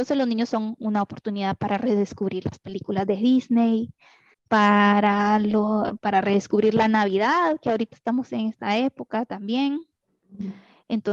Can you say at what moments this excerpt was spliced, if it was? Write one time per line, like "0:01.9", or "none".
0:04.3